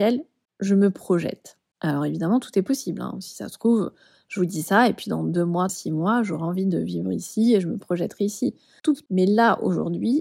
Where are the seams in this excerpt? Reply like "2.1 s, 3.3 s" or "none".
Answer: 5.7 s, 9.1 s